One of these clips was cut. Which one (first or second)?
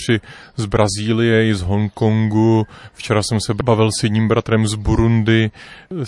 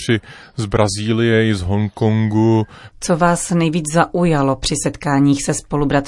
second